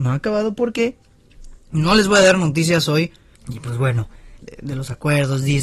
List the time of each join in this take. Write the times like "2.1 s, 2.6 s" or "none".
3.4 s, 4.4 s